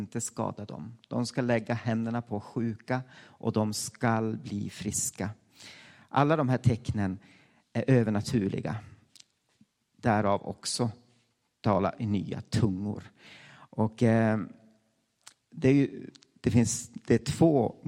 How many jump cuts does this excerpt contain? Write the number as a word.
zero